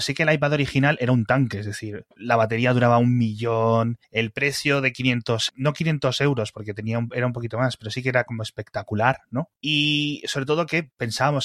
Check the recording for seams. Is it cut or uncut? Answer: cut